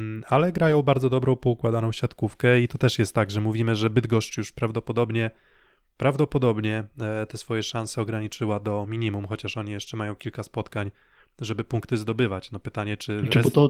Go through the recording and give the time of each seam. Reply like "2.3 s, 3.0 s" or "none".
none

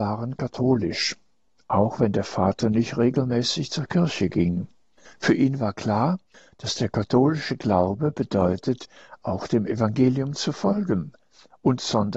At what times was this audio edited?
5.1 s

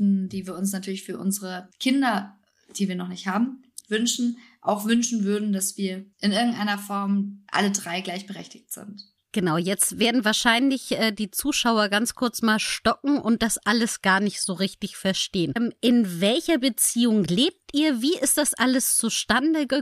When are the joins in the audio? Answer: 15.6 s

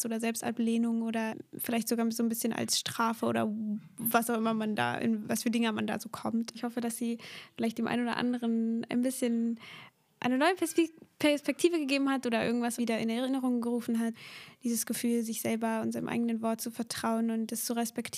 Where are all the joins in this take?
6.5 s, 12.8 s

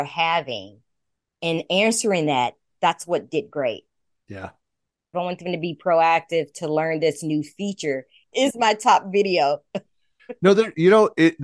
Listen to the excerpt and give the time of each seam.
5.1 s, 8.3 s

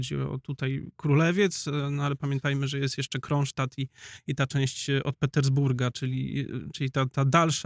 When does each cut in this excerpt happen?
none

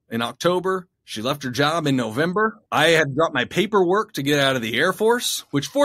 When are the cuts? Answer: 0.9 s, 2.7 s

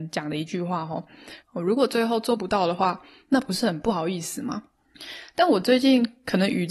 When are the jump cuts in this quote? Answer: 1.4 s

